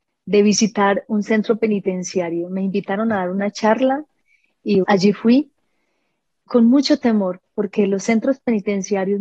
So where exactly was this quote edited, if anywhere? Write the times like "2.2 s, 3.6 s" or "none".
4.8 s